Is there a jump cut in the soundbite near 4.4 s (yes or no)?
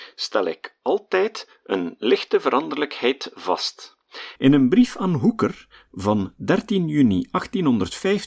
yes